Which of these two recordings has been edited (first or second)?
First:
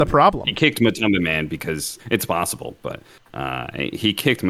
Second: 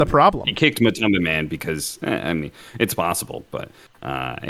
first